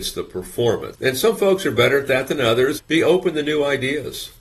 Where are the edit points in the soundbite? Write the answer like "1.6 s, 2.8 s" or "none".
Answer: 0.9 s, 2.8 s